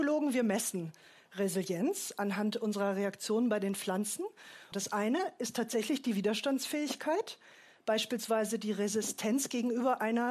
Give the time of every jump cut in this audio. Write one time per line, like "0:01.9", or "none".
0:04.7